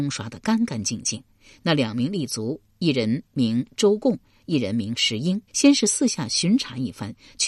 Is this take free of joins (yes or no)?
no